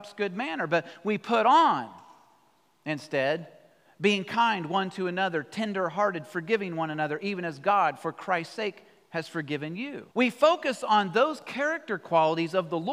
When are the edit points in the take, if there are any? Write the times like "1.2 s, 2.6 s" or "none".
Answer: 10.1 s

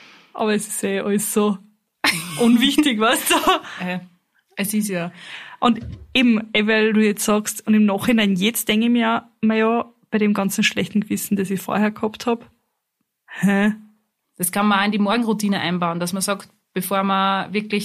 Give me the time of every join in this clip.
14.2 s

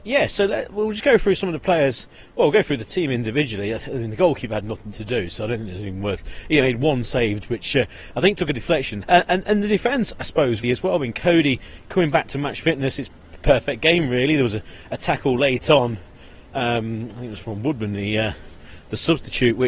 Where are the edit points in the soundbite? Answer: 7.4 s, 9.0 s, 10.6 s

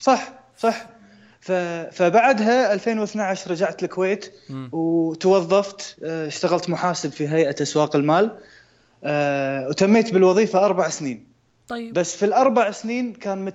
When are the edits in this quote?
none

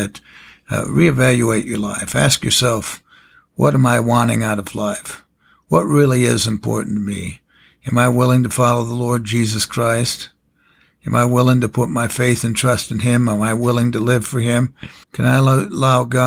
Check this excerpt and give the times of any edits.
15.0 s

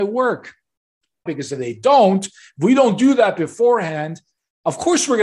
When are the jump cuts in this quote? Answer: 1.3 s

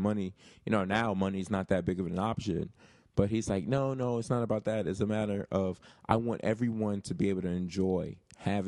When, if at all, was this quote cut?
none

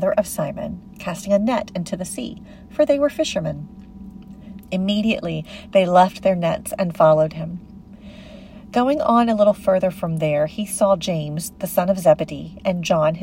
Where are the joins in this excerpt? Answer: 4.6 s

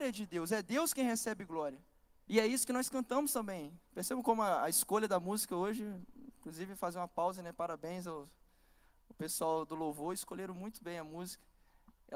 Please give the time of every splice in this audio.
2.3 s

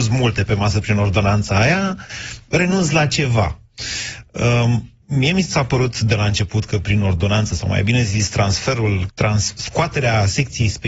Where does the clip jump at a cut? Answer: 5.0 s, 9.1 s

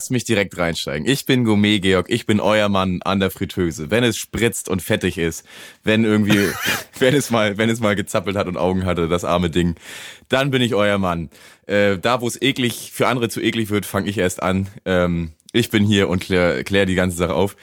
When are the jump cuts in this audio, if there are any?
none

